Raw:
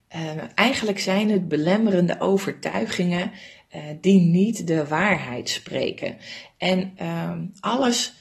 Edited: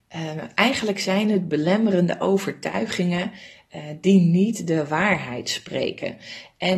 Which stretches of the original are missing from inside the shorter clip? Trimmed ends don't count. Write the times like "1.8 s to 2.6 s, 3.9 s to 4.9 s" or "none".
none